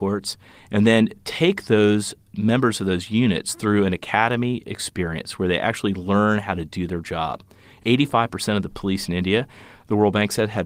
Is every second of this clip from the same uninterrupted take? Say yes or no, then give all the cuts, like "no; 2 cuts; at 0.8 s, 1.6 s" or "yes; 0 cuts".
yes; 0 cuts